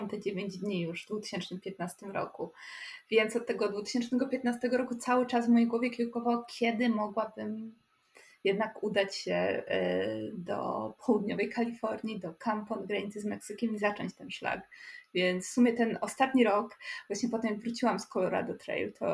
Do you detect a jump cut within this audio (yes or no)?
no